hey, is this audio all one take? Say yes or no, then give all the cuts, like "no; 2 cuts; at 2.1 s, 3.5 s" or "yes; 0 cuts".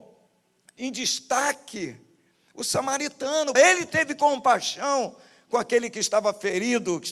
no; 1 cut; at 3.6 s